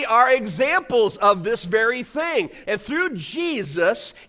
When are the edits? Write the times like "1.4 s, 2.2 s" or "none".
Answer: 2.6 s